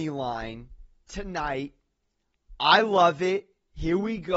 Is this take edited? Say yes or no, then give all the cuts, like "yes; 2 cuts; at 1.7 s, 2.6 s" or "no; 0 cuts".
no; 0 cuts